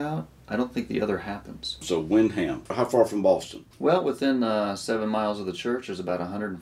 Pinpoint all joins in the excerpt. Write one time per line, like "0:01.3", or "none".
0:03.7